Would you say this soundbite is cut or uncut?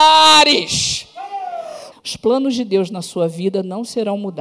cut